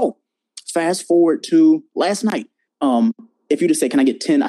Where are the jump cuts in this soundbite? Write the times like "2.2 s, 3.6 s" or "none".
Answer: 2.7 s